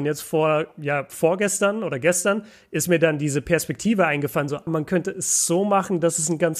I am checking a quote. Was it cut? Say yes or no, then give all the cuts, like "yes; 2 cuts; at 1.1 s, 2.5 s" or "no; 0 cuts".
yes; 1 cut; at 4.7 s